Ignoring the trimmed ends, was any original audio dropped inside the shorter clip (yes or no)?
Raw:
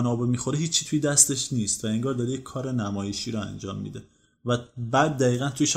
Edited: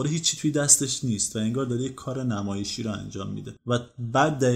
yes